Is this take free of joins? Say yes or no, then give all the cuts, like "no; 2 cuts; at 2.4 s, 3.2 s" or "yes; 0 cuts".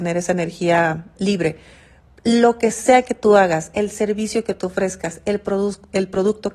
no; 1 cut; at 1.2 s